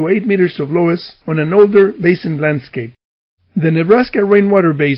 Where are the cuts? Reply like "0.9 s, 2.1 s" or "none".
3.4 s